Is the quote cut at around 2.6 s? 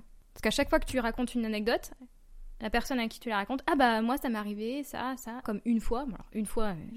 no; 1 cut; at 5.4 s

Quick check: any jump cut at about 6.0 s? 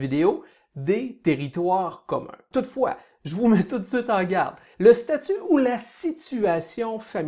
no; 2 cuts; at 2.5 s, 4.7 s

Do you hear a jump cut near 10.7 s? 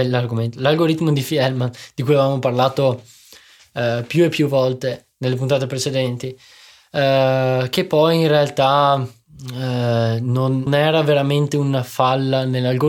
yes; 1 cut; at 10.7 s

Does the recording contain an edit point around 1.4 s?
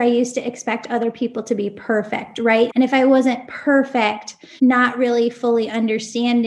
no; 2 cuts; at 2.7 s, 4.6 s

